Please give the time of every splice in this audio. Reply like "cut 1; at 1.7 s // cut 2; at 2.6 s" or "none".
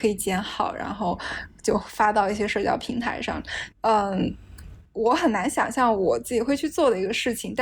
cut 1; at 3.7 s